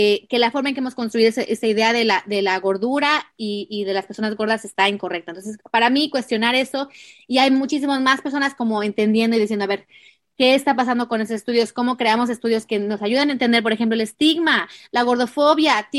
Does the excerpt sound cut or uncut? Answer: uncut